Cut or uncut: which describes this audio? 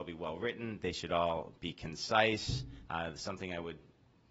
cut